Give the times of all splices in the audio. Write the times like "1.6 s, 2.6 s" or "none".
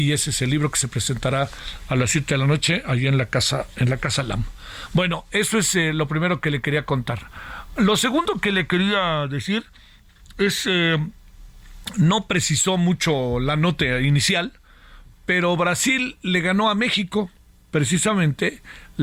none